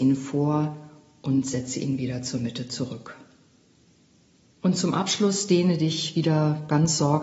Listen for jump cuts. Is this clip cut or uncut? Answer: cut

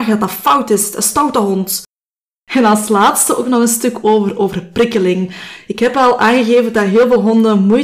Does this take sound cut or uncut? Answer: uncut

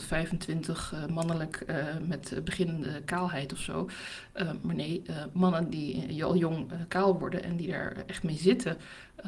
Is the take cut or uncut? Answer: uncut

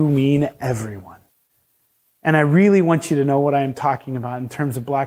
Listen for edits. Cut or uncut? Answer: uncut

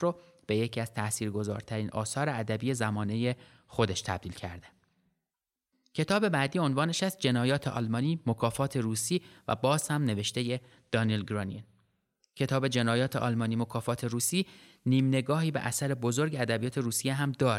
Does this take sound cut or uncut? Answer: uncut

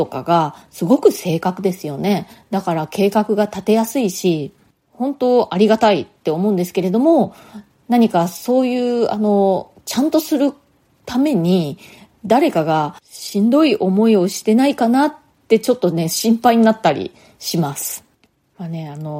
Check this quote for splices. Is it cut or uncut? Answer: uncut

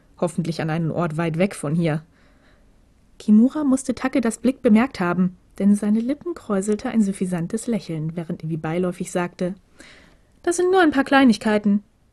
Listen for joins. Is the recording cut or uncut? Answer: cut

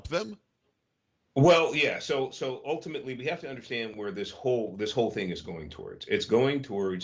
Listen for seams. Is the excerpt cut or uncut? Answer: uncut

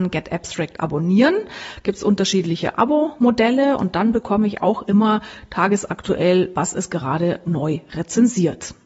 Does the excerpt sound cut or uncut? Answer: uncut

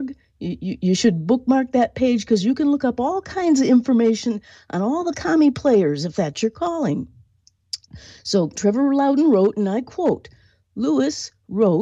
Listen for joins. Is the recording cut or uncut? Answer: cut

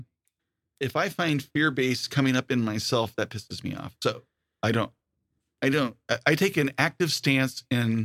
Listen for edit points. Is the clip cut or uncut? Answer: uncut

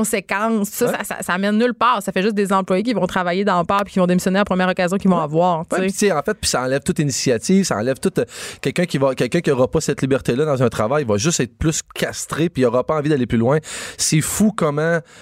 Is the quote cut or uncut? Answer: uncut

